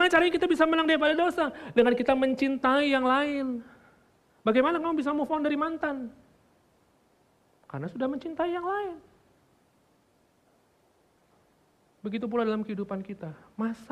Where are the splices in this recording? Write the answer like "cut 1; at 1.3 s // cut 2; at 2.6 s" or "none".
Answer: none